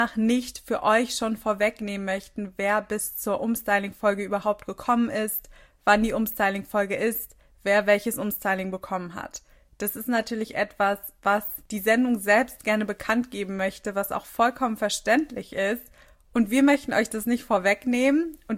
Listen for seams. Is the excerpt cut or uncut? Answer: uncut